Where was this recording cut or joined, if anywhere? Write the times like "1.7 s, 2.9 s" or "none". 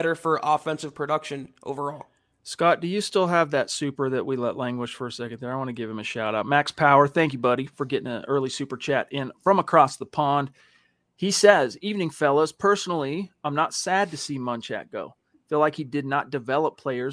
none